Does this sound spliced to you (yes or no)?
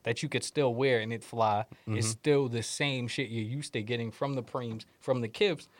yes